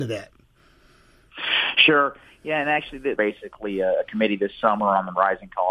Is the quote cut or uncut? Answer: cut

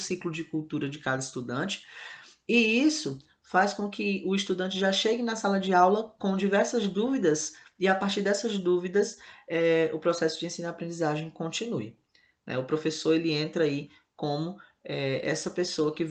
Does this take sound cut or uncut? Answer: uncut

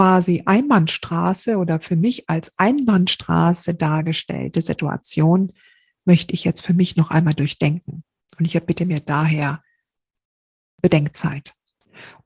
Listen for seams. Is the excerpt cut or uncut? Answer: uncut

